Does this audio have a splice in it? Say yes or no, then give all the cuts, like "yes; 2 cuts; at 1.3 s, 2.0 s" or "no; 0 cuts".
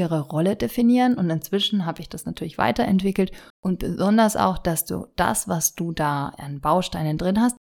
yes; 1 cut; at 3.5 s